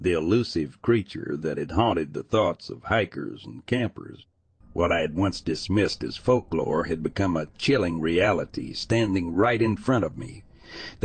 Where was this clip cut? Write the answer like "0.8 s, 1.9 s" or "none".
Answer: 4.6 s